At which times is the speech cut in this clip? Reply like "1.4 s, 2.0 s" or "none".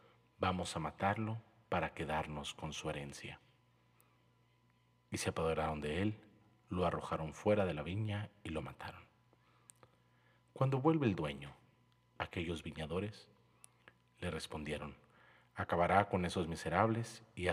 12.2 s